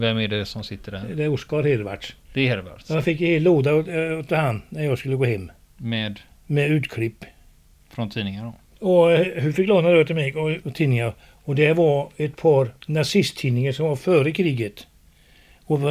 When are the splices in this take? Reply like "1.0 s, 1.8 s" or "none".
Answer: 8.7 s, 10.6 s, 12.8 s